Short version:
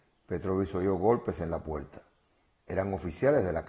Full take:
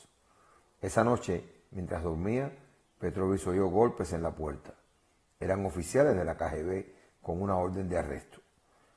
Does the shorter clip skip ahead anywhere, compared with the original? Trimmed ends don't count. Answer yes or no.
no